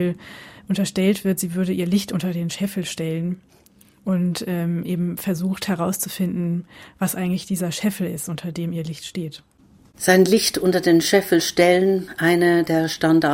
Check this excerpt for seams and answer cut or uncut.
uncut